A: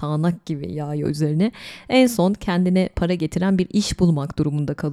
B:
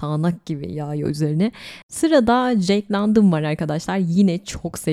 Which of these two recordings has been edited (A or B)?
B